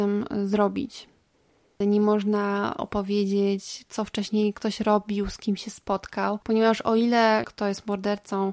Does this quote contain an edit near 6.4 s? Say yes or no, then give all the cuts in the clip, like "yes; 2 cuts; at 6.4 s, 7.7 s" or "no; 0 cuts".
yes; 3 cuts; at 1.8 s, 6.4 s, 7.4 s